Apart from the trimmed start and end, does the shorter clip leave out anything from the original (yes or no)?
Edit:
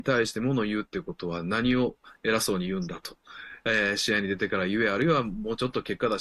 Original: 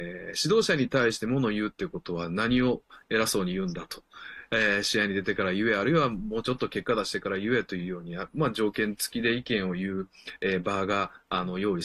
no